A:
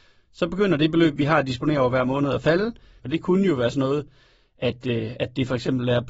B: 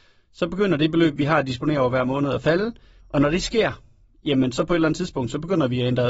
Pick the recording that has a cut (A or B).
A